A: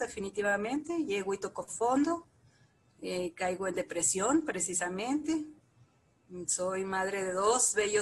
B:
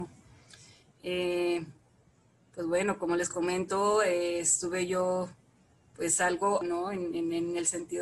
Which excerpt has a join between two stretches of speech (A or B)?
B